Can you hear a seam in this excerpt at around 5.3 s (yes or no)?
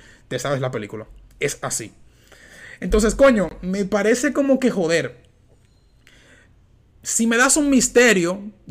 no